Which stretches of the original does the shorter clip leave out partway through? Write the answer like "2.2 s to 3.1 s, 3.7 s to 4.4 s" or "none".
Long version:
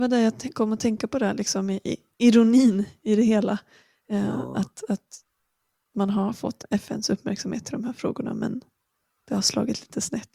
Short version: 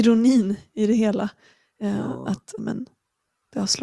4.9 s to 8.3 s

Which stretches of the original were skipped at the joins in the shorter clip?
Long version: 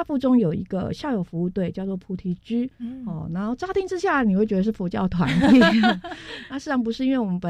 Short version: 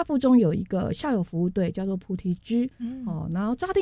none

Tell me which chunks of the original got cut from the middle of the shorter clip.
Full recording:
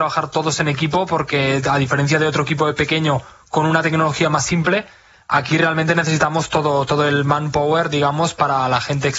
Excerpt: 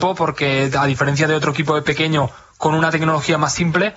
none

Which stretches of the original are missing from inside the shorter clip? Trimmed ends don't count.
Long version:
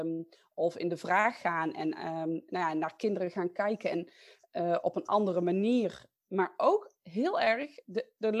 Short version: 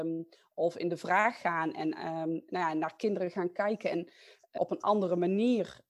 4.6 s to 4.8 s

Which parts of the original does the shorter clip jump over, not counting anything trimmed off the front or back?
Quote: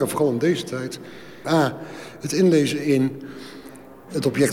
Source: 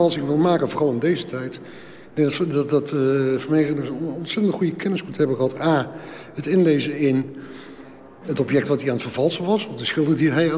2.1 s to 5.6 s

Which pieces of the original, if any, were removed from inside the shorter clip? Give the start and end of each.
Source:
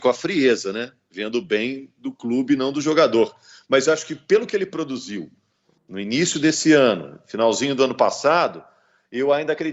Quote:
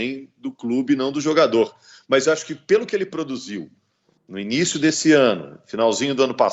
none

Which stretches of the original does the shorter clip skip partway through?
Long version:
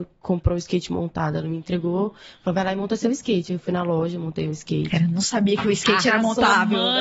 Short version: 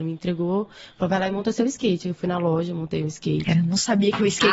none

